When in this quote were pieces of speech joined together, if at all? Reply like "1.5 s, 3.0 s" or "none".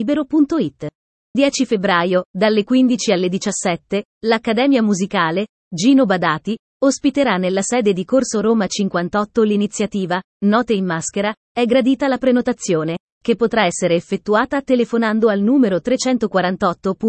1.3 s